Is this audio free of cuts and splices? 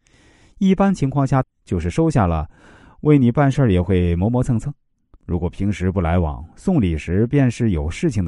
no; 2 cuts; at 1.4 s, 5.2 s

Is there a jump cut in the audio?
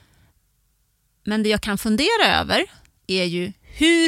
no; 0 cuts

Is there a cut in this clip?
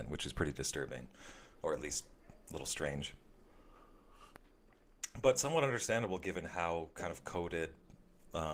no; 0 cuts

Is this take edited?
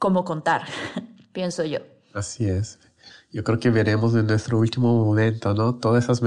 no; 0 cuts

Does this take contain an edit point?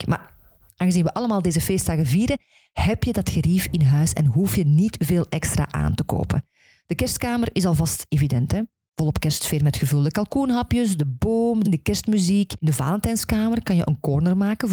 yes; 1 cut; at 11.6 s

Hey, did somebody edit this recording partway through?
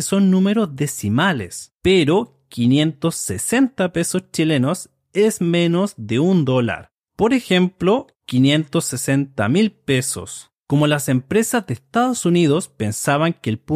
yes; 2 cuts; at 1.8 s, 7.1 s

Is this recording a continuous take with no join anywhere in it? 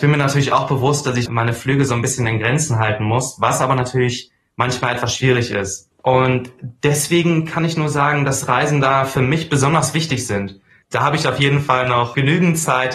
no; 3 cuts; at 1.3 s, 5.9 s, 10.8 s

